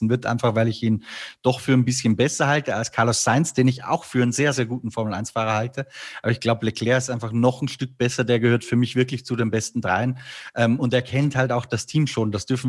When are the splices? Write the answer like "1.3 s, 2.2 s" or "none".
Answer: none